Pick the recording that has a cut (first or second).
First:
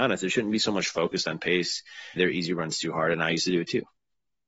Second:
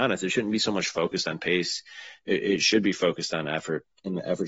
first